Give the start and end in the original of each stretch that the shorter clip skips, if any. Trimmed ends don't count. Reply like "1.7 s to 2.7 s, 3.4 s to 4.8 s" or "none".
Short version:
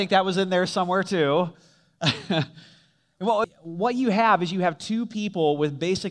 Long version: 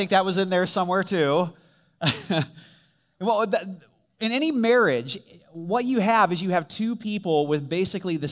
3.4 s to 5.3 s